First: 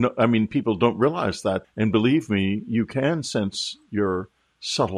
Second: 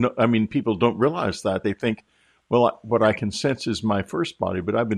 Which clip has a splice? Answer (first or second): first